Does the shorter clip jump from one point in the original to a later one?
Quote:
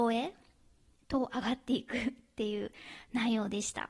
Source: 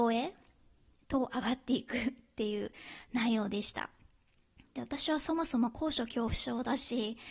no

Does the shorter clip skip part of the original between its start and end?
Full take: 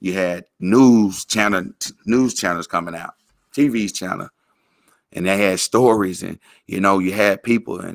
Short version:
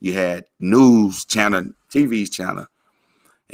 yes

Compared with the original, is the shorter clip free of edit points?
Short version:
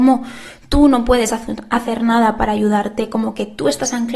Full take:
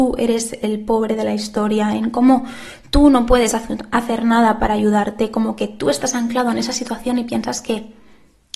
yes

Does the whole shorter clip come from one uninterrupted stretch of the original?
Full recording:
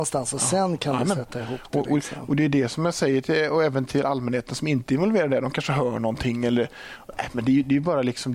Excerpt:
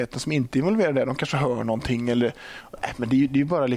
yes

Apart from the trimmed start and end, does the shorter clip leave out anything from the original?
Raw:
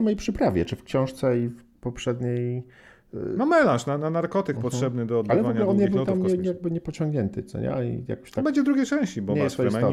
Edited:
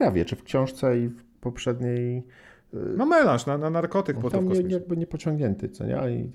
yes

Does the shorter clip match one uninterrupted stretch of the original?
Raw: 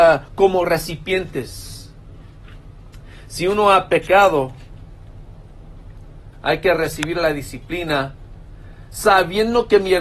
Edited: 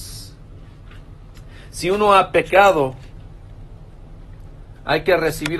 yes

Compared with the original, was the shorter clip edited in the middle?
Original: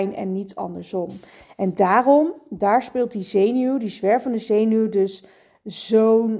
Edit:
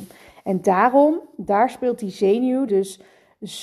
yes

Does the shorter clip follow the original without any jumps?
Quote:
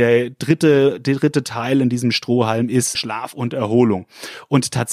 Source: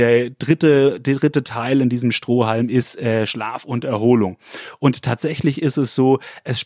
no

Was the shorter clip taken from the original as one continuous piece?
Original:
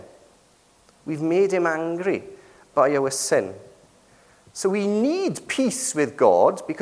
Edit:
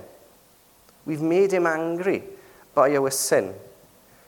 yes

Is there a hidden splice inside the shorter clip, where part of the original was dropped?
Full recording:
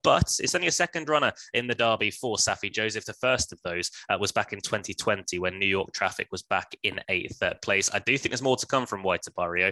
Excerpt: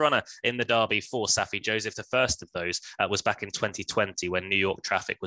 no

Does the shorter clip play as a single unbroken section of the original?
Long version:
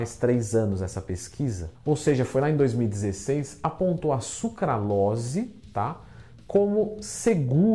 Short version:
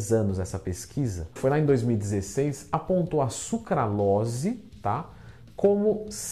no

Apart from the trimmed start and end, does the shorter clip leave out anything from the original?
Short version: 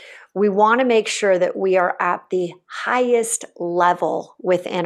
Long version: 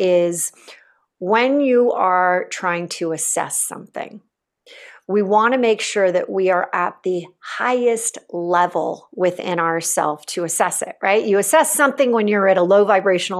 no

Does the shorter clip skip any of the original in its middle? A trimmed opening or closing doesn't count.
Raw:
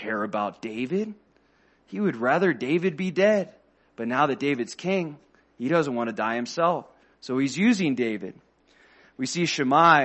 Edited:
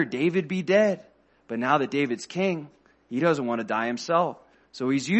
no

